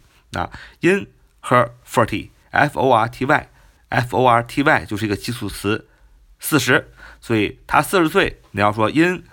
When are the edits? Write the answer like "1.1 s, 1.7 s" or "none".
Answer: none